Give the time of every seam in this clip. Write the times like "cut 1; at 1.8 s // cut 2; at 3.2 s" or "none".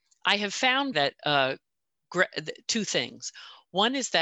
cut 1; at 0.9 s